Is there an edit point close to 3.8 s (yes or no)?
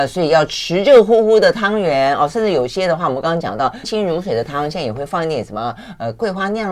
yes